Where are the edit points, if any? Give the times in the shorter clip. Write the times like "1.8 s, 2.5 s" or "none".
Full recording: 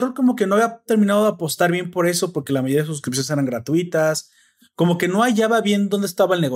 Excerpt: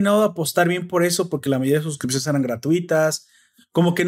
none